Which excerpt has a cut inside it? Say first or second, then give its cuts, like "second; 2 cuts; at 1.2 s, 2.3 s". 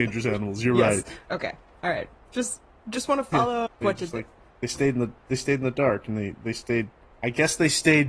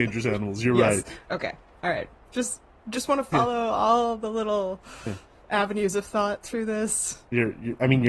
first; 2 cuts; at 3.7 s, 7.1 s